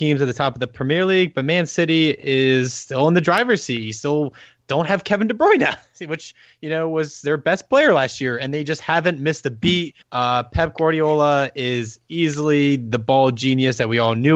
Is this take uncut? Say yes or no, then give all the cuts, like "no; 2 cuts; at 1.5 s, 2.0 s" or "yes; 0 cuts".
no; 1 cut; at 10.0 s